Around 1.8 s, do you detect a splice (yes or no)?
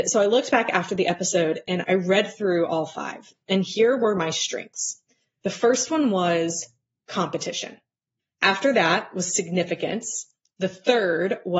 yes